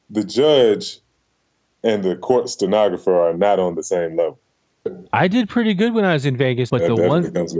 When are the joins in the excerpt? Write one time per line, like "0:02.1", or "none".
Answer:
0:04.9
0:06.7